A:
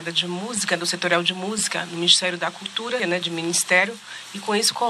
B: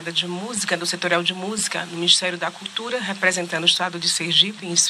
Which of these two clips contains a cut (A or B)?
A